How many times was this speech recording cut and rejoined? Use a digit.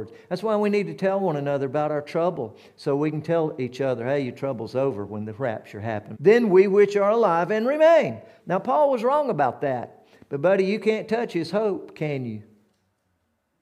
2